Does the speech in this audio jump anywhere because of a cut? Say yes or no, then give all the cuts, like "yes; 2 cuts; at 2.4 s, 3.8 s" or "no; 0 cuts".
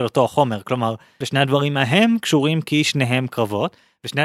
yes; 1 cut; at 1.2 s